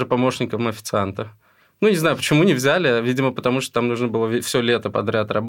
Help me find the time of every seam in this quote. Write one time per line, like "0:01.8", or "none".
none